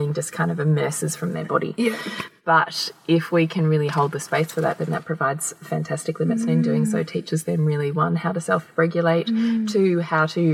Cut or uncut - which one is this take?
uncut